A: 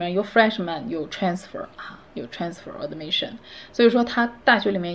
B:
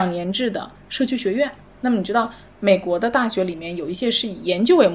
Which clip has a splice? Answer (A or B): B